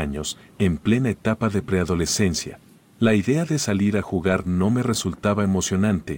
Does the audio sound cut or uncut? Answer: uncut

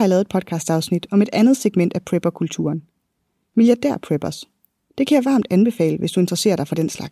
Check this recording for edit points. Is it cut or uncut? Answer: uncut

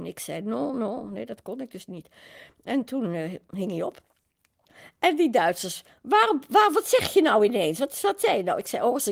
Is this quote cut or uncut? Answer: uncut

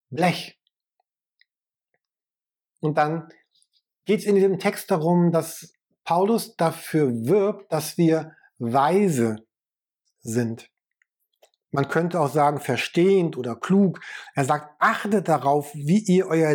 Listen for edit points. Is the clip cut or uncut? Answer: uncut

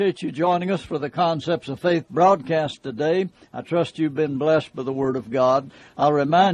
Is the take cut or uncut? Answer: uncut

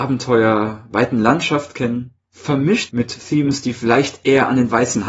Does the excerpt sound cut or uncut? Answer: cut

